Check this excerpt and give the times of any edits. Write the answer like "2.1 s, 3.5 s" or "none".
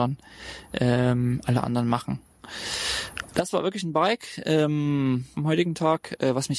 5.3 s

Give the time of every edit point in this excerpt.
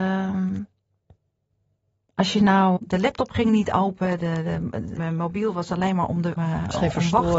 2.8 s, 5.0 s, 6.4 s

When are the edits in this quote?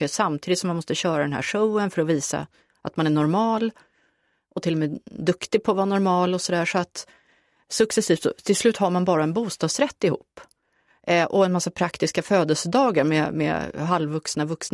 none

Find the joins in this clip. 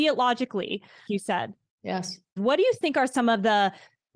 1.1 s, 2.4 s

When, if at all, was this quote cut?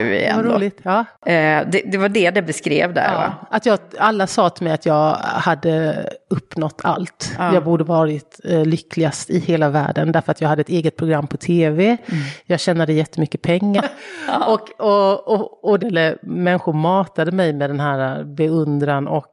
13.8 s, 15.8 s

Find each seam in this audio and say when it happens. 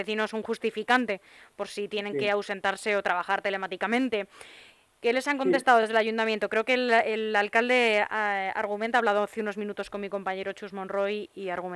none

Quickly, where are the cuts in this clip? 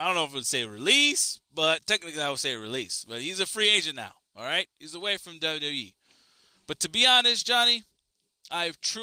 none

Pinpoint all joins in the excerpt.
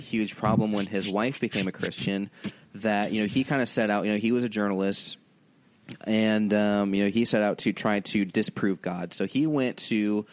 none

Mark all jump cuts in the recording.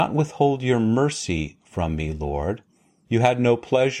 3.0 s

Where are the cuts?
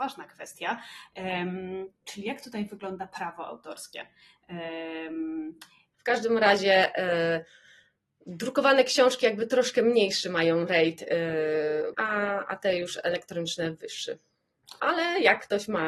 5.9 s, 11.9 s, 14.8 s

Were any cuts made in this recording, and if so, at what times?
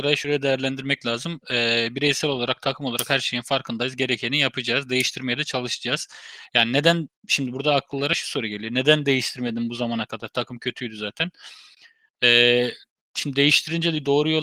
none

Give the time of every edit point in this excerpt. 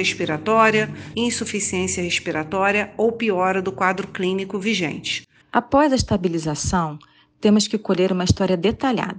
1.1 s, 5.4 s

